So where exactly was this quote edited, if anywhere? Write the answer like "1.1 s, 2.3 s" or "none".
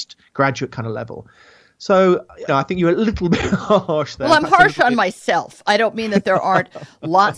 2.5 s